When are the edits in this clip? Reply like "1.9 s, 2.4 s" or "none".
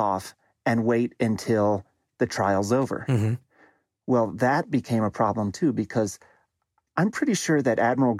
none